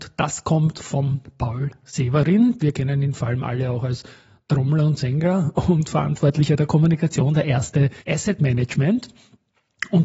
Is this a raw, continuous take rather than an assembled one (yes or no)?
no